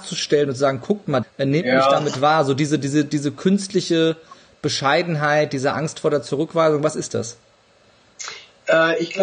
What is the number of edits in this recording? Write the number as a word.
one